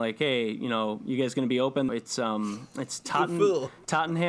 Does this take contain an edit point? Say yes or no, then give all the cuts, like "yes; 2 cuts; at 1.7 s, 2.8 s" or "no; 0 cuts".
yes; 1 cut; at 1.9 s